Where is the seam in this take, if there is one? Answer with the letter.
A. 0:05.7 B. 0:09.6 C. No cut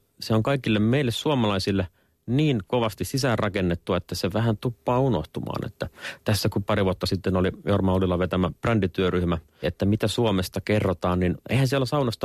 B